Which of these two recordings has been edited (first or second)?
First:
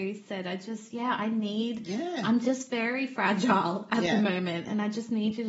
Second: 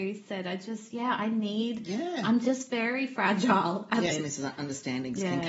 second